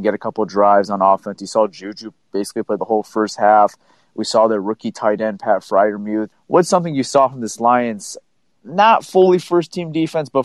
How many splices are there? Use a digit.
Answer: 1